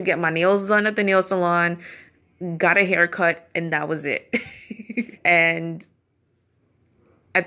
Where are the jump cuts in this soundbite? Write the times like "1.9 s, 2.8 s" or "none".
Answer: 5.2 s